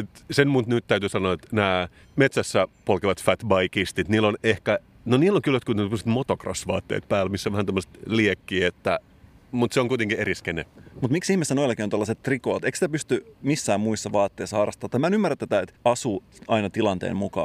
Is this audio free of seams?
yes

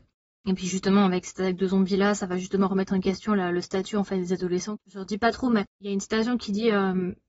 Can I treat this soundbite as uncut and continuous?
no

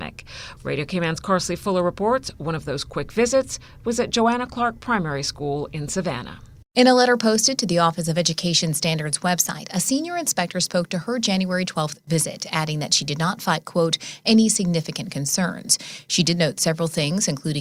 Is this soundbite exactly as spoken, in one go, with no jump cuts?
yes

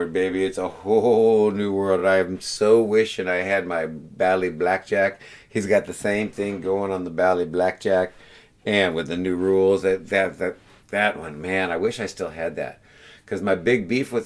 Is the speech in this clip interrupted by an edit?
no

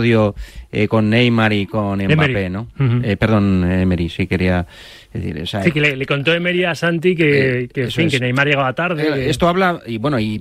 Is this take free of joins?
yes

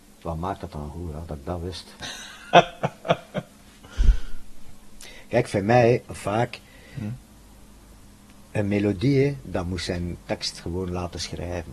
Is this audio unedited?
no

